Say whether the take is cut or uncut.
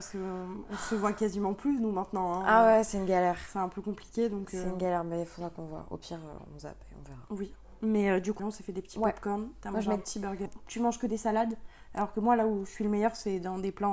cut